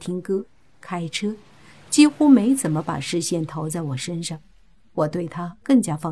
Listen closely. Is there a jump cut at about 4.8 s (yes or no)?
no